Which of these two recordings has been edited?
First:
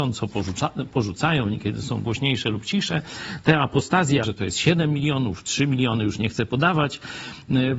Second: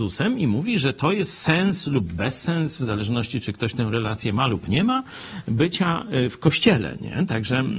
first; 1 cut; at 4.2 s

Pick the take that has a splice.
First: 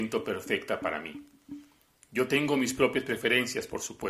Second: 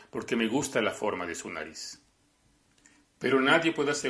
first; 1 cut; at 1.9 s

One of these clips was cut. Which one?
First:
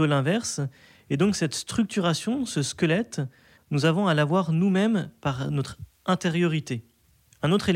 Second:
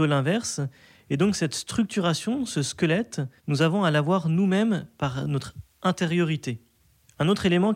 second; 1 cut; at 3.4 s

